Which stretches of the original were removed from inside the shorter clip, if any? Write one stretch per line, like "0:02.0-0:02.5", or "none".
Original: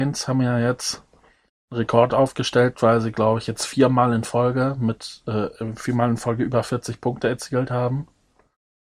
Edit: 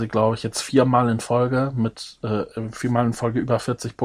none